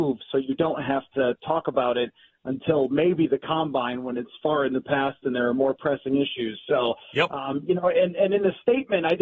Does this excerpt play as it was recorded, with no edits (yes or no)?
yes